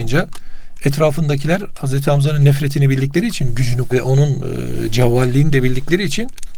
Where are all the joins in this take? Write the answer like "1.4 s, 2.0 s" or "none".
3.9 s